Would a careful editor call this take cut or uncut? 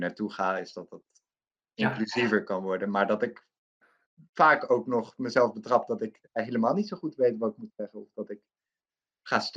uncut